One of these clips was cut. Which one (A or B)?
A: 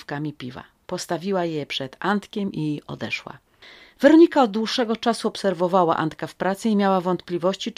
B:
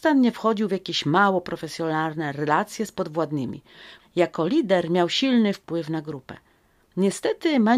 B